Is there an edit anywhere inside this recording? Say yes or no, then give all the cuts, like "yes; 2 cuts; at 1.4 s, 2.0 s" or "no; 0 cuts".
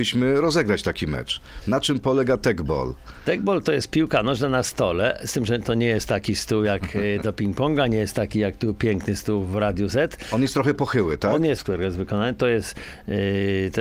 yes; 1 cut; at 11.6 s